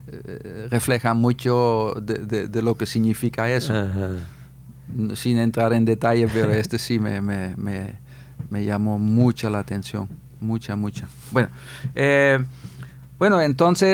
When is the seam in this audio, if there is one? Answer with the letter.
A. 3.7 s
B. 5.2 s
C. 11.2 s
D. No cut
D